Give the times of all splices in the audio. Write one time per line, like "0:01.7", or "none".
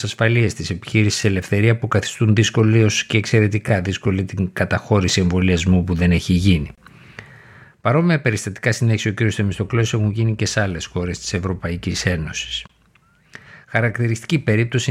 none